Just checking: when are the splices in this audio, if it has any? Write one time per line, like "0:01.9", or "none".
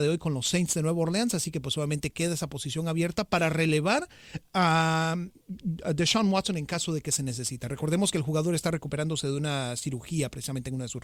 none